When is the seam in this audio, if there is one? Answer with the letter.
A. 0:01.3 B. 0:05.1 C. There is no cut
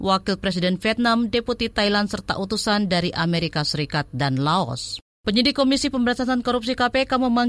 B